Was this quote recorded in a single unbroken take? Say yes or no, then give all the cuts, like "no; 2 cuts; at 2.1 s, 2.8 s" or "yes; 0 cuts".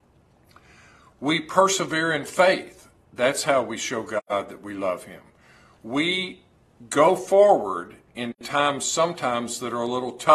yes; 0 cuts